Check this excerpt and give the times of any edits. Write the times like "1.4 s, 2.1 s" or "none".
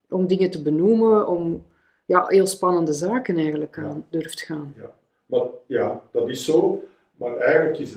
none